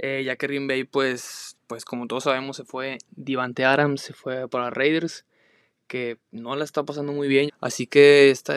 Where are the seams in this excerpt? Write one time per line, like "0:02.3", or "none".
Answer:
0:07.5